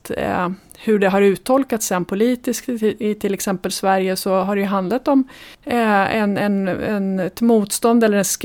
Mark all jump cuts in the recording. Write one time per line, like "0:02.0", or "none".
0:05.5